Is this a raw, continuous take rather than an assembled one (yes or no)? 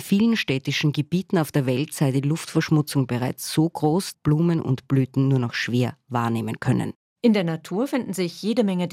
no